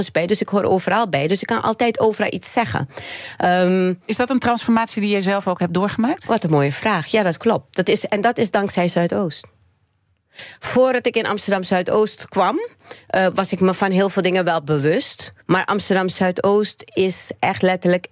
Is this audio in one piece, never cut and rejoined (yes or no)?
no